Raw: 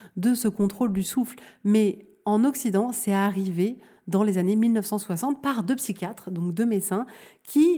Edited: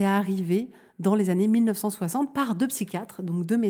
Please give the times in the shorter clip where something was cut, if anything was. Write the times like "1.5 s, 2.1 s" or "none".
none